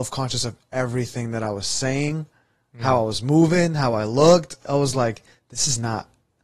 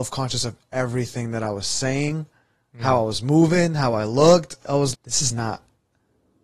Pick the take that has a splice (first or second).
second